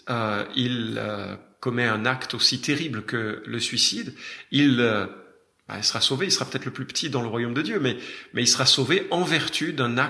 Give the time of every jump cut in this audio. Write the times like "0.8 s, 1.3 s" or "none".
none